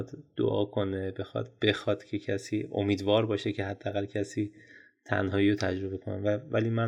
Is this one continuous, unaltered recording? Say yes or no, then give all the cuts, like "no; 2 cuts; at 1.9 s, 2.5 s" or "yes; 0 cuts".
yes; 0 cuts